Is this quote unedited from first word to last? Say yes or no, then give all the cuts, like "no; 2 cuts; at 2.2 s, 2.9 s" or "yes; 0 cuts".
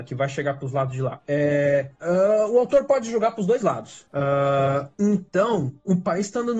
no; 1 cut; at 4.1 s